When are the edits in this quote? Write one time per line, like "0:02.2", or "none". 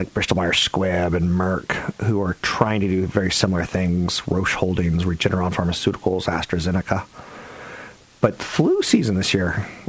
none